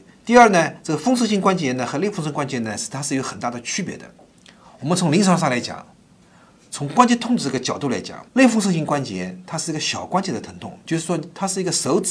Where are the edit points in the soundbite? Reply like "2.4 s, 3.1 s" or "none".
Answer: 8.3 s